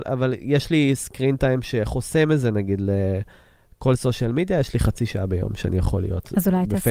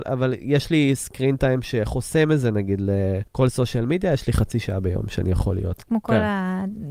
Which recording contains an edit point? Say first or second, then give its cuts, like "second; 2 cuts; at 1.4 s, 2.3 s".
second; 2 cuts; at 3.3 s, 5.8 s